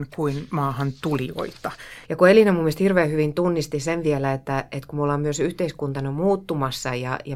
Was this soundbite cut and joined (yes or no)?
yes